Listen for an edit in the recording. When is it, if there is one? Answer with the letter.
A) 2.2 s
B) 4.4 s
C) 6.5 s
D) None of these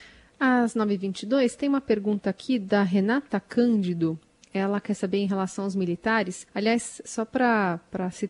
C